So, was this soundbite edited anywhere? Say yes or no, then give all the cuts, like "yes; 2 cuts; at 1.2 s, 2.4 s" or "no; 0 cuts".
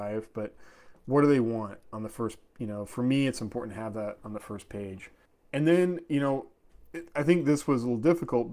no; 0 cuts